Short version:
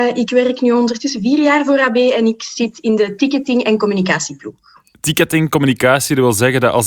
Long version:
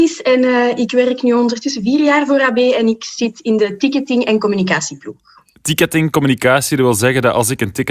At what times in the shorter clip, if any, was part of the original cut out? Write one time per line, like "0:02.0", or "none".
none